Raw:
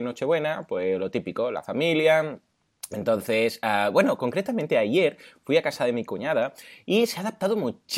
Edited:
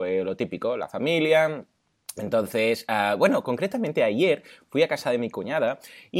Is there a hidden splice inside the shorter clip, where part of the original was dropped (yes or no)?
no